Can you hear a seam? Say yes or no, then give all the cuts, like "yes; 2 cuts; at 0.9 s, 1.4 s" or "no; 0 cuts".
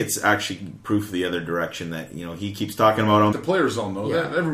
yes; 1 cut; at 3.3 s